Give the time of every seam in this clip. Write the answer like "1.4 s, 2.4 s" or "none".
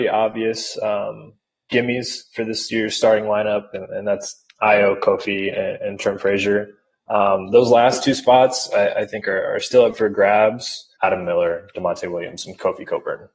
11.0 s